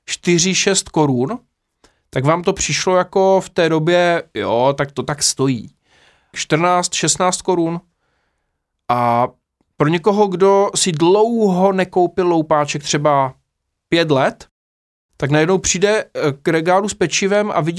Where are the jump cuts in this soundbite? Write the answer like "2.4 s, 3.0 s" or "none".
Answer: 6.3 s